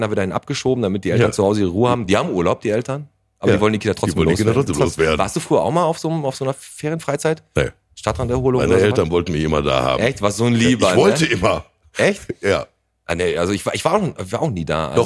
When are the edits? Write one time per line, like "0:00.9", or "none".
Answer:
none